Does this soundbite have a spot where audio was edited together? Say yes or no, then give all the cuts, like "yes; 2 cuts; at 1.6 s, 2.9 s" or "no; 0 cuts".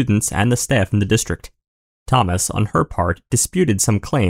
no; 0 cuts